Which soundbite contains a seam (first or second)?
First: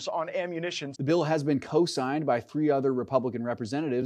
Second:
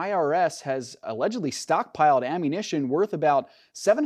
first